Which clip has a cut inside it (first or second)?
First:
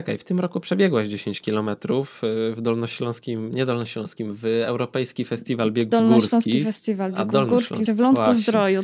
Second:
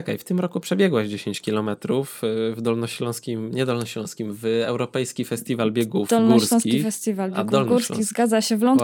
first